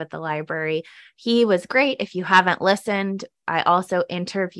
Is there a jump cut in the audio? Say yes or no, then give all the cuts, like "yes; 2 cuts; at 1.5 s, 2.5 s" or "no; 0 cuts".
no; 0 cuts